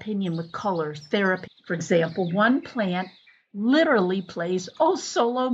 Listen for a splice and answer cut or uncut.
cut